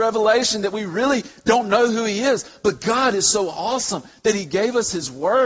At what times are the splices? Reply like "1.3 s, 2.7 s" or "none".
none